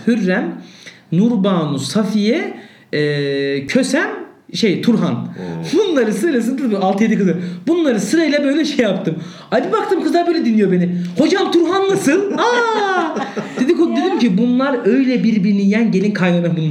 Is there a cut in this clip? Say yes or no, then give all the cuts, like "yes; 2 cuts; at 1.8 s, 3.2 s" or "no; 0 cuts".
no; 0 cuts